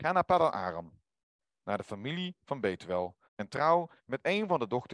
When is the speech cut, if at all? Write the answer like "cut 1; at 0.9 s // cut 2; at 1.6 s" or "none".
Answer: cut 1; at 3.2 s